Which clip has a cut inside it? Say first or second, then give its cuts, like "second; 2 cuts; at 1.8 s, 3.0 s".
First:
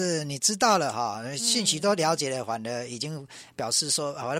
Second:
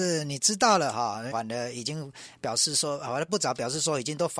second; 2 cuts; at 1.3 s, 3.3 s